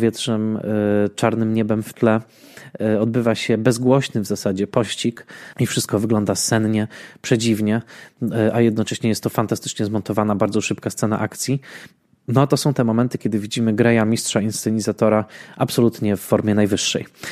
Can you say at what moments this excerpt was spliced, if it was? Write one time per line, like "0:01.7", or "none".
0:05.5